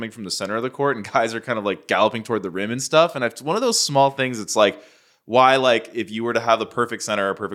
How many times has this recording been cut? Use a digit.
0